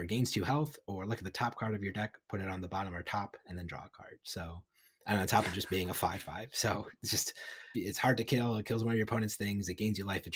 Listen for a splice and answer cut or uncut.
cut